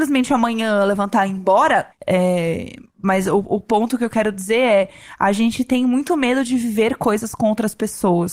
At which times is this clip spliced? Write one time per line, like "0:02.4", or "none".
0:01.9